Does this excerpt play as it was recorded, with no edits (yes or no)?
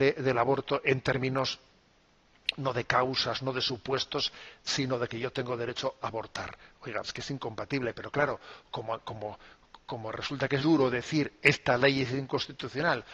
no